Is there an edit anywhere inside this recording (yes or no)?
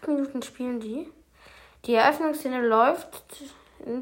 no